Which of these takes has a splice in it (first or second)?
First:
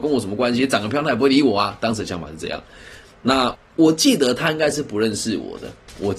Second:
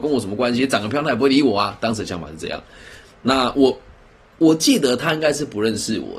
first